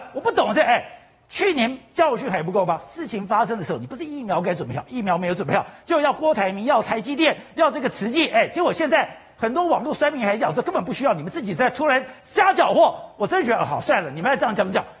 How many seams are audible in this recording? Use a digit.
0